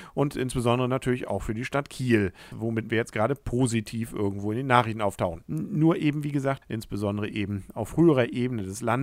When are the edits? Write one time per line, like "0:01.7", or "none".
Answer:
0:02.5
0:05.4
0:06.6